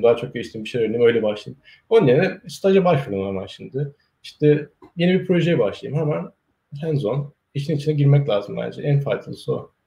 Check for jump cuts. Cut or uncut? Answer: uncut